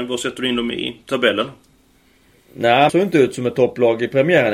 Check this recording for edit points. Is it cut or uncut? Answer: cut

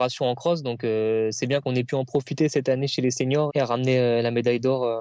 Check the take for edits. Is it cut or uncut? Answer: cut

